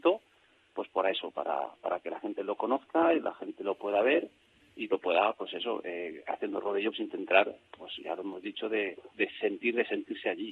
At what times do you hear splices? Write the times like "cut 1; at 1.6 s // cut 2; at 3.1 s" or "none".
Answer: cut 1; at 6.9 s